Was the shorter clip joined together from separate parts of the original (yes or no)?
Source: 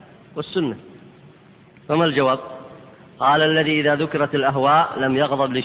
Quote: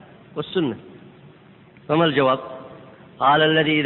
no